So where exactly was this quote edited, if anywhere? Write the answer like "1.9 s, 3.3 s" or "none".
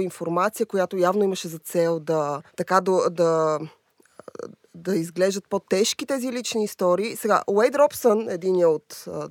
2.5 s